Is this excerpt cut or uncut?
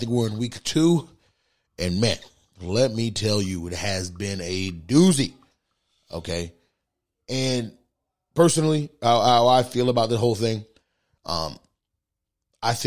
uncut